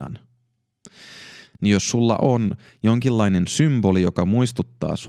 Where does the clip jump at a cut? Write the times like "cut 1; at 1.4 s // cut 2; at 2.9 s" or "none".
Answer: cut 1; at 1.5 s